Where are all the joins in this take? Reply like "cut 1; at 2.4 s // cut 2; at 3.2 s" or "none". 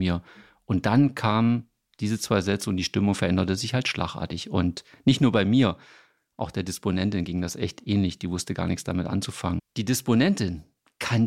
cut 1; at 9.6 s